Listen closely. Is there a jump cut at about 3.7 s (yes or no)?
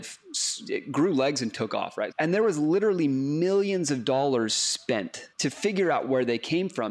no